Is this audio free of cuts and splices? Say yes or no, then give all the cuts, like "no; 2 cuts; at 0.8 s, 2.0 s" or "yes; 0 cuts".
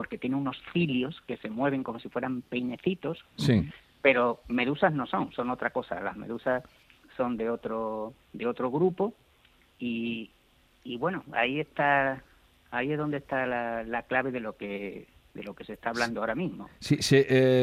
yes; 0 cuts